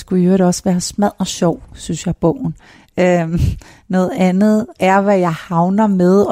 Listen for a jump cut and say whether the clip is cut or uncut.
cut